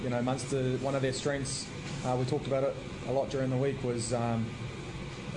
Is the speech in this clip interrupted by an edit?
no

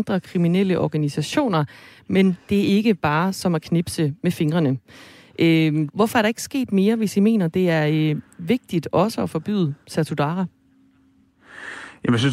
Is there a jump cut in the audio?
yes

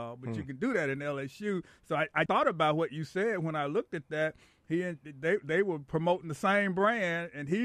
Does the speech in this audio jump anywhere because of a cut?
yes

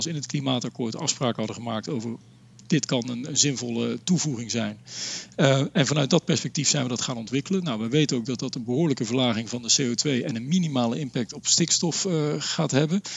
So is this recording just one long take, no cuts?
yes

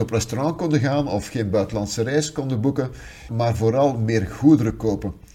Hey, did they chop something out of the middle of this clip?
yes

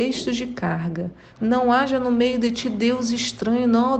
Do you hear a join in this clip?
yes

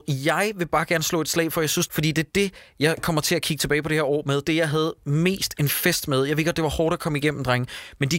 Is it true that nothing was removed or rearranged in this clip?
no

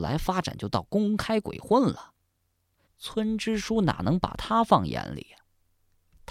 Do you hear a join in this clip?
yes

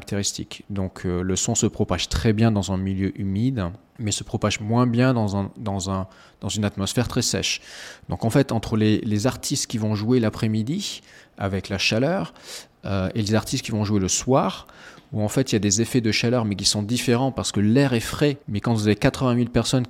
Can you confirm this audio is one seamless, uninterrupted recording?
no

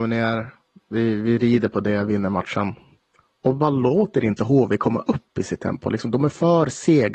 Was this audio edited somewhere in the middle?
no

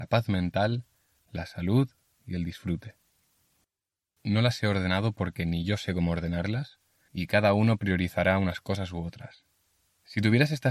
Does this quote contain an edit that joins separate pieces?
no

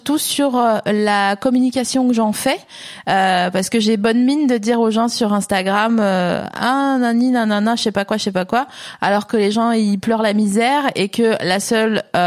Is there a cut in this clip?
no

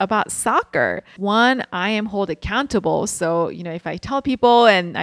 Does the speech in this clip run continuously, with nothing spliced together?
no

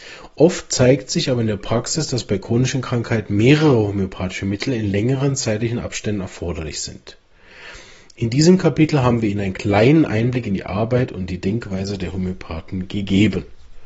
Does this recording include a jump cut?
no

